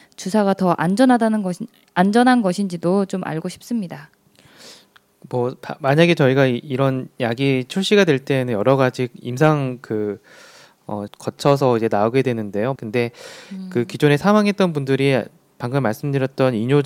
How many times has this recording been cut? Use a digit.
2